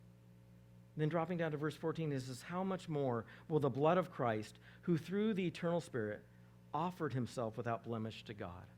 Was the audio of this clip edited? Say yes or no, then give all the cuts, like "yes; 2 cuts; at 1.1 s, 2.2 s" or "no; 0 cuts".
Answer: no; 0 cuts